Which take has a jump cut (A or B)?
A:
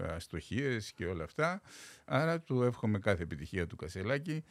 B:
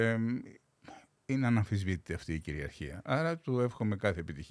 A